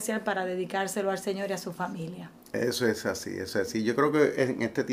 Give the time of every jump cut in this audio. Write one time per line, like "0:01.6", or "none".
none